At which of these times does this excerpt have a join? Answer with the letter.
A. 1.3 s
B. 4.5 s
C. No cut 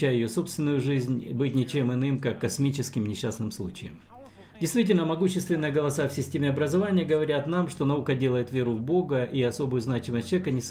B